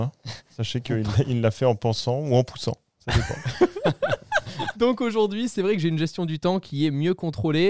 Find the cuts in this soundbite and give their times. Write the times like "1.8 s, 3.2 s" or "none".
none